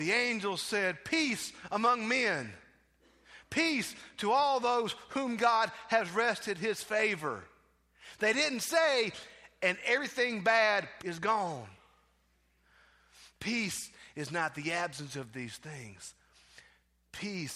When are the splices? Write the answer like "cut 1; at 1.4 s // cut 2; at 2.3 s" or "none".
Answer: cut 1; at 11.0 s // cut 2; at 13.3 s